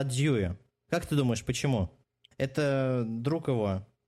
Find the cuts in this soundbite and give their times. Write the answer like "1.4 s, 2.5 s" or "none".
2.3 s